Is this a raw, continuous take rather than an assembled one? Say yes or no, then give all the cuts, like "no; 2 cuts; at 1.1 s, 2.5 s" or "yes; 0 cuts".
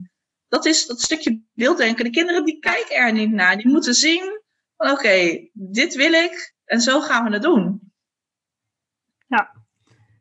yes; 0 cuts